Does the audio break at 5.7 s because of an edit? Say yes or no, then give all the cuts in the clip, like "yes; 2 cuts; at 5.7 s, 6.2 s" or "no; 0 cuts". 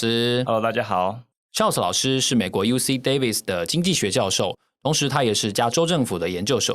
yes; 1 cut; at 5.7 s